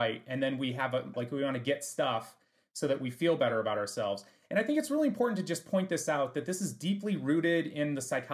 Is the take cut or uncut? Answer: cut